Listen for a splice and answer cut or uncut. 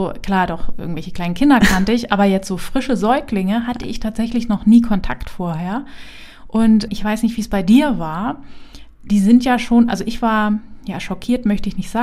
uncut